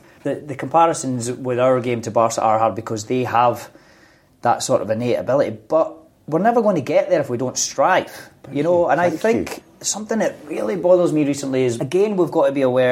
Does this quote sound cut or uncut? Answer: uncut